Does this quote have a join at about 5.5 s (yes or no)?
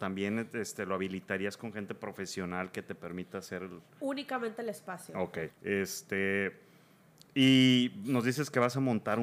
yes